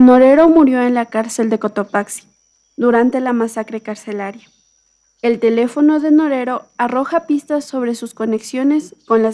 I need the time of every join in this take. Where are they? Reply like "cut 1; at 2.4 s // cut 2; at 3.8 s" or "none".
none